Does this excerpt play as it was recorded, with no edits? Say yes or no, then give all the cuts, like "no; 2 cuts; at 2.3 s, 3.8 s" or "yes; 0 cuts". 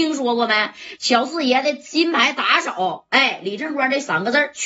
yes; 0 cuts